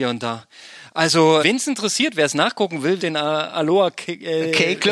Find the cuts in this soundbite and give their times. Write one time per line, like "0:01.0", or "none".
0:01.4
0:03.0

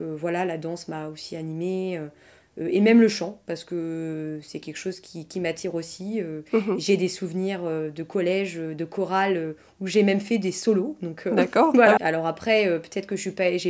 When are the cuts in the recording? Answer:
0:12.0

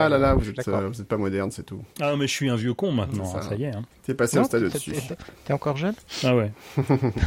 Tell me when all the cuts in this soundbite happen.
0:01.9
0:03.9

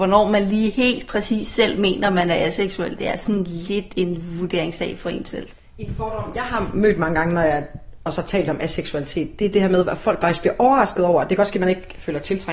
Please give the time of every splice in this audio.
none

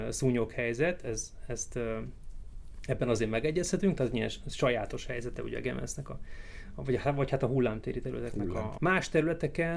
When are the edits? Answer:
0:08.8

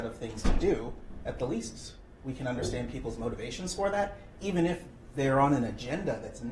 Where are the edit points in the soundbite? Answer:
none

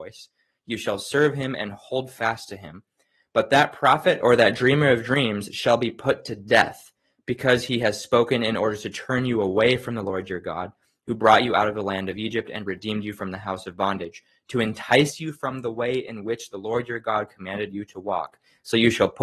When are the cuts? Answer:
none

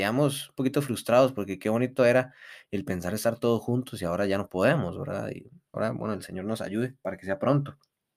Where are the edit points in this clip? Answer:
0:05.7

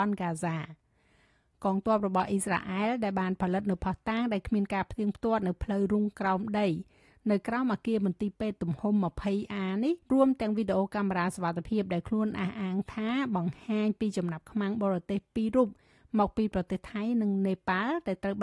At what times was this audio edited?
0:10.0

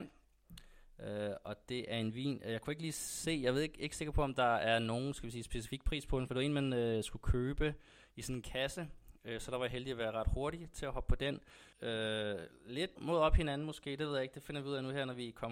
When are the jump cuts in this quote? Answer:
0:11.7
0:13.0

